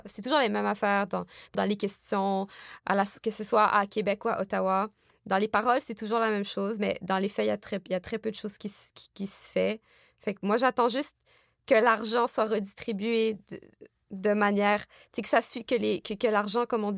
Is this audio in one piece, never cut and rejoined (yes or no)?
no